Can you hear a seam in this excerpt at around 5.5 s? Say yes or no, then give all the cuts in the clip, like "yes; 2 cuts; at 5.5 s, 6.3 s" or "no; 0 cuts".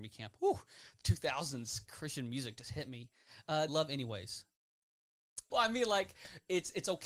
yes; 2 cuts; at 3.7 s, 5.5 s